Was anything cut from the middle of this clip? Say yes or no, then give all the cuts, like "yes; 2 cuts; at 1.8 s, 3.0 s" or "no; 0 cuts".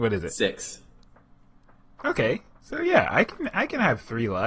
no; 0 cuts